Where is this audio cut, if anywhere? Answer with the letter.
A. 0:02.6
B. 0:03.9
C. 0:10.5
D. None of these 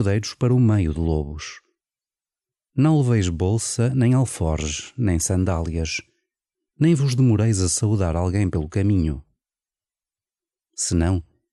C